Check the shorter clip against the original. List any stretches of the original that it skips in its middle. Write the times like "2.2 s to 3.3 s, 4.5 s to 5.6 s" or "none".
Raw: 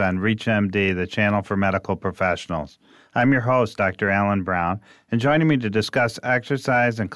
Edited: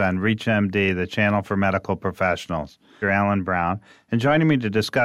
3.0 s to 4.0 s